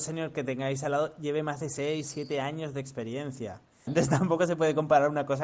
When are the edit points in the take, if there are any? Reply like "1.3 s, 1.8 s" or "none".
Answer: 3.9 s